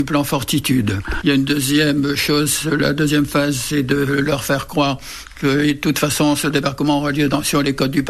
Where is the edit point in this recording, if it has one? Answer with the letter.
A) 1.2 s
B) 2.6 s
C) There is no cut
A